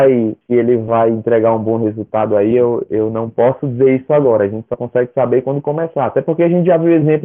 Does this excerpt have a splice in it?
no; 0 cuts

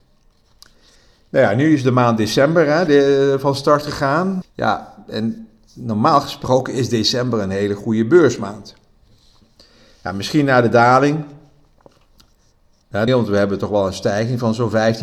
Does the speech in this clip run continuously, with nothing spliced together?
no; 2 cuts; at 4.4 s, 13.1 s

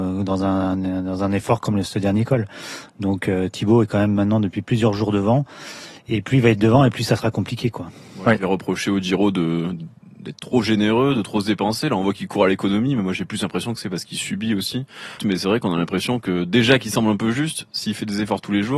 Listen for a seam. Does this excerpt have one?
yes; 1 cut; at 15.2 s

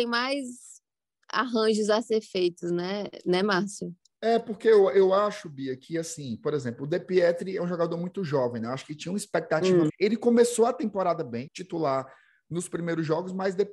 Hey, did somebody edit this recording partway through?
yes; 2 cuts; at 9.9 s, 11.5 s

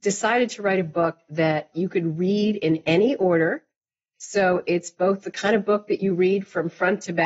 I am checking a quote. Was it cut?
yes; 1 cut; at 1.7 s

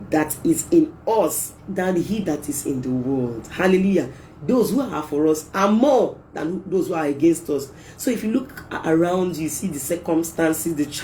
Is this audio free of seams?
no; 1 cut; at 1.6 s

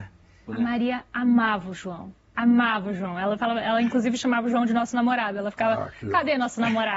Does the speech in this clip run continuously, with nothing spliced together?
yes; 0 cuts

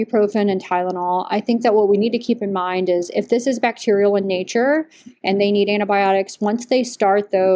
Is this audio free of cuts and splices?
yes; 0 cuts

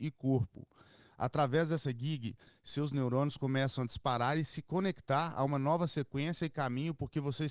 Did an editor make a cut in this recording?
yes; 1 cut; at 1.1 s

